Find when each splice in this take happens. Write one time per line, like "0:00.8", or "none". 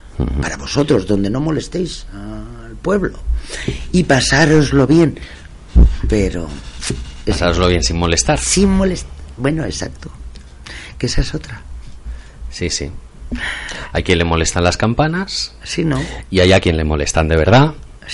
none